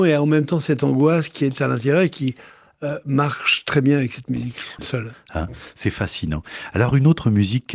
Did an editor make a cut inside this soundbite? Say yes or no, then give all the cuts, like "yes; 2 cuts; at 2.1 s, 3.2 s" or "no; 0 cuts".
yes; 1 cut; at 4.8 s